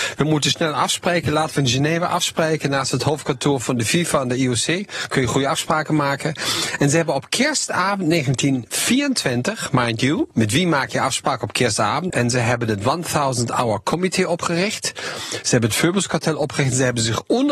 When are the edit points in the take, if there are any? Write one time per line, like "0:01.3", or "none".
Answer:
0:10.3
0:12.1

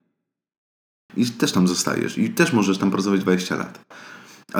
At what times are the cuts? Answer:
0:01.1

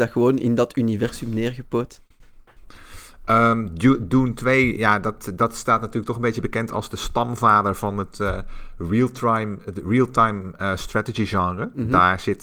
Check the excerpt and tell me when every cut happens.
none

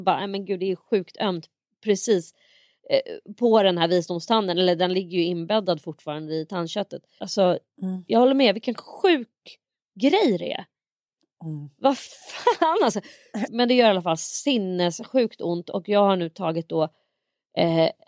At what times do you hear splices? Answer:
0:07.2
0:13.5

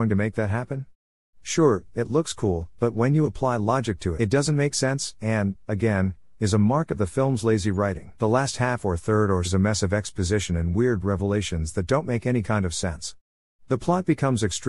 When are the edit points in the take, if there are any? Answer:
0:04.2
0:08.2
0:09.4

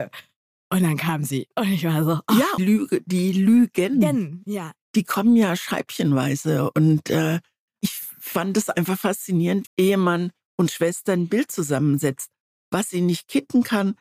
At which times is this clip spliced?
0:02.6
0:09.7
0:12.6

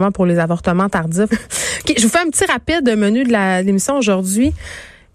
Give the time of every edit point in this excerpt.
0:01.3

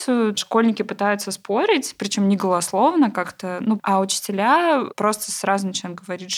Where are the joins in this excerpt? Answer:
0:03.8

